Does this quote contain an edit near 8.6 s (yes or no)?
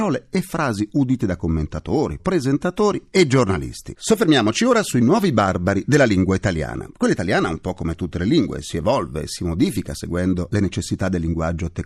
no